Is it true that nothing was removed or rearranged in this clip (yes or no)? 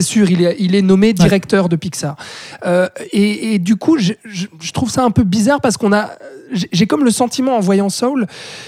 yes